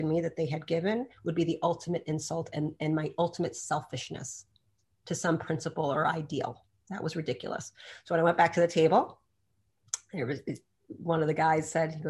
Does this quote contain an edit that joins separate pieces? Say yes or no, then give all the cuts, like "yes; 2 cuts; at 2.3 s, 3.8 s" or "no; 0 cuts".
no; 0 cuts